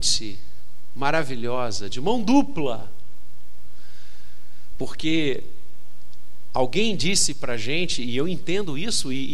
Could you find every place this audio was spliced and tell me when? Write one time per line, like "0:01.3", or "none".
none